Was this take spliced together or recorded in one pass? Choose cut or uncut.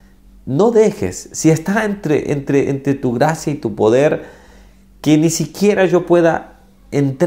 uncut